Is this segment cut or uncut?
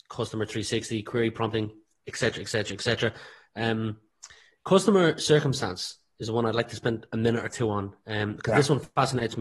uncut